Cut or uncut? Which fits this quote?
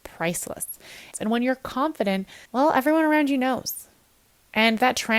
cut